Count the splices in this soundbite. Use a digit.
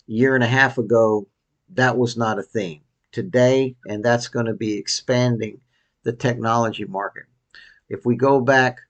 2